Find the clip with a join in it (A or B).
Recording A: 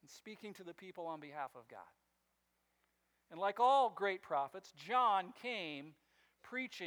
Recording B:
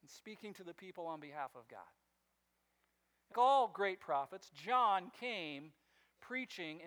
B